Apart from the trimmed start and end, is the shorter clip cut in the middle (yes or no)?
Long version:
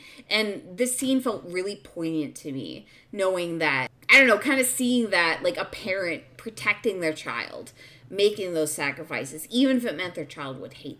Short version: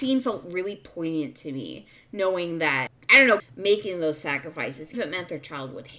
yes